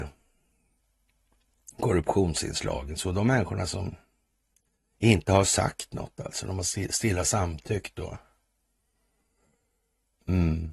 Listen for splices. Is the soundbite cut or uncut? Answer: uncut